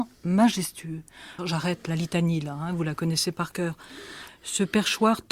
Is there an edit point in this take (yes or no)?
yes